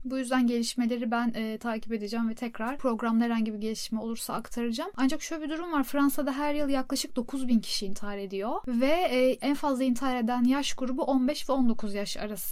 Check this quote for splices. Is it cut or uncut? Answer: cut